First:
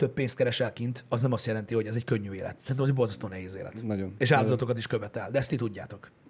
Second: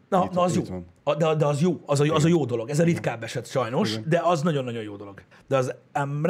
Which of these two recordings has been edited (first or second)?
second